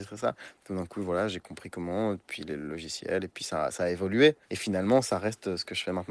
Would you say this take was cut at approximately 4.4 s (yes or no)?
yes